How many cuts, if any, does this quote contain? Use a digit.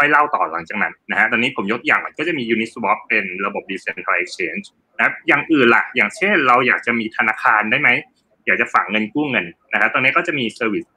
0